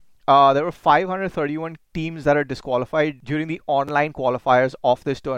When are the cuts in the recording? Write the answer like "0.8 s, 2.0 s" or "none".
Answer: 1.9 s

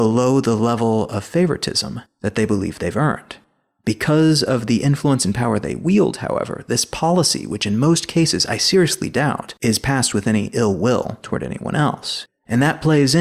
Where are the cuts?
12.3 s

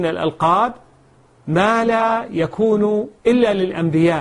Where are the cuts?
3.2 s

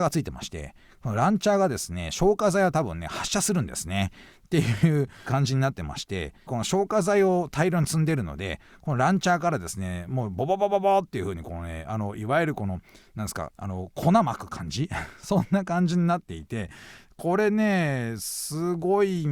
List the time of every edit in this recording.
6.5 s, 13.5 s

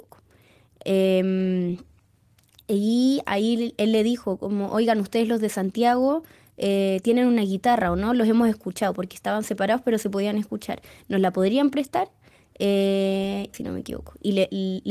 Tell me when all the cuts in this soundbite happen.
13.5 s

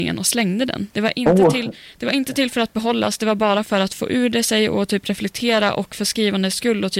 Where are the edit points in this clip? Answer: 0.9 s

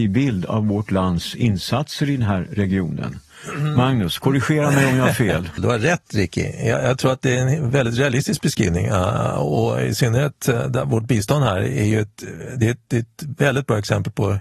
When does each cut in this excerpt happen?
5.6 s

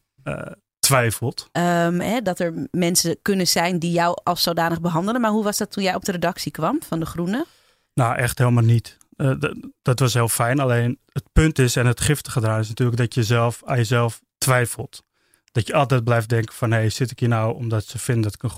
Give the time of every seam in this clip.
1.5 s

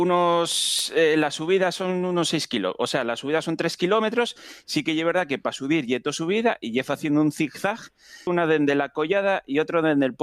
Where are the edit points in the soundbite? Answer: 8.3 s

